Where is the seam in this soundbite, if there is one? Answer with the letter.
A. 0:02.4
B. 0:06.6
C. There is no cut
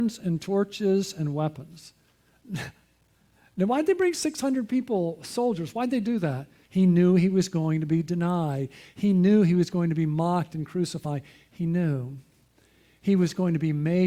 B